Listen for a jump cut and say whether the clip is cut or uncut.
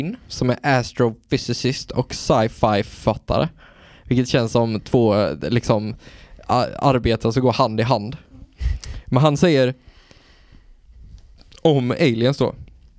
uncut